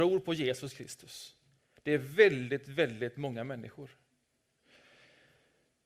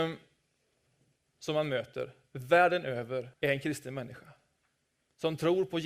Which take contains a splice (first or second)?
second